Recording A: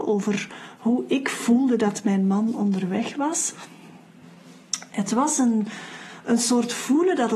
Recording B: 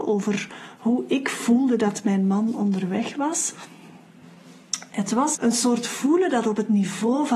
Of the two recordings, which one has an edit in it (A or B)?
B